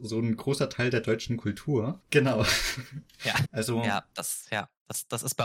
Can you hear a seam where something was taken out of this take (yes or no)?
yes